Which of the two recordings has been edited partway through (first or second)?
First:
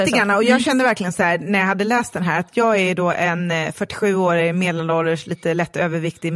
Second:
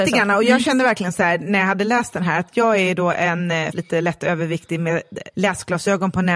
second